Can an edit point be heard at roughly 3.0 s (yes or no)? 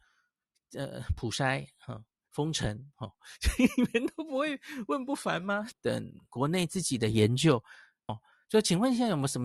no